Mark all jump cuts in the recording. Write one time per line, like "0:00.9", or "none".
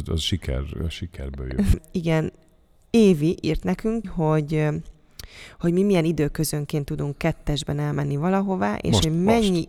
0:01.7
0:04.0